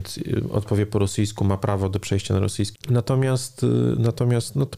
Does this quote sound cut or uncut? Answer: cut